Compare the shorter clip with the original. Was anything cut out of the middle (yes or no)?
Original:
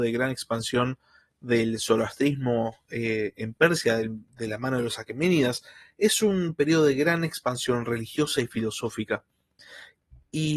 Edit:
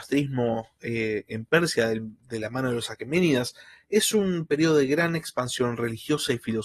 no